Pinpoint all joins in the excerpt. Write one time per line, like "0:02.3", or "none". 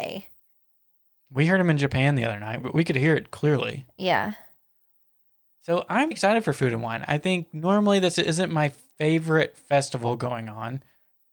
0:02.6
0:06.1